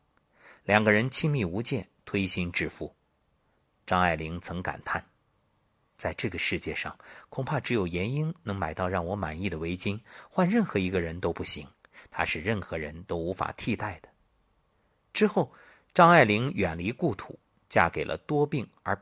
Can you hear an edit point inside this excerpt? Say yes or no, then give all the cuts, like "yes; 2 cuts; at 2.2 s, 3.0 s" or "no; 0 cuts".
no; 0 cuts